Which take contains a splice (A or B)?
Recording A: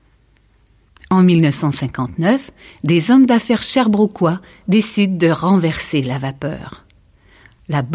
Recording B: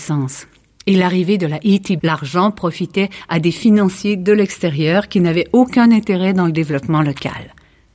B